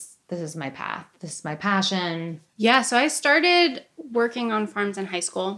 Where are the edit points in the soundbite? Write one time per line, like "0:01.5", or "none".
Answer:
0:02.5